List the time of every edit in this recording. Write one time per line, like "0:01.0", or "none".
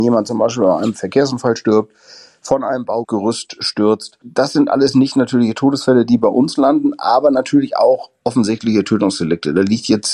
0:04.2